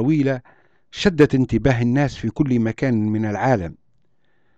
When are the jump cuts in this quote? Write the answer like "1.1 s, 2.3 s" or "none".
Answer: none

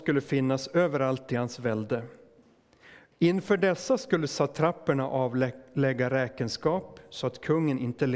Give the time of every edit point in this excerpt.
3.1 s

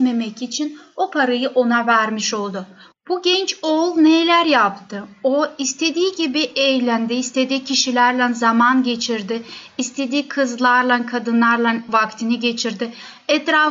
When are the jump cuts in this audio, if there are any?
none

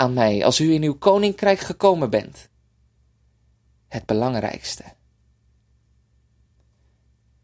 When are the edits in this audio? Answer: none

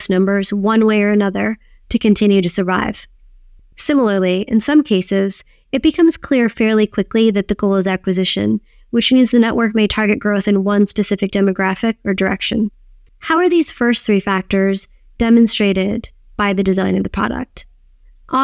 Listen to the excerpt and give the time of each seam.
13.1 s

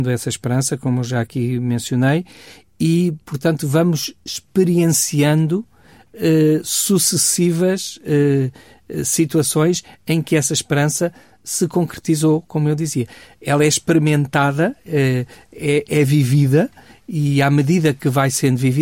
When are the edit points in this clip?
none

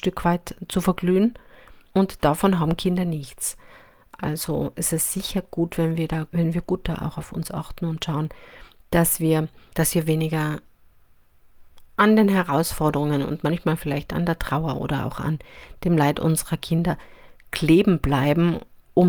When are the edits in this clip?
none

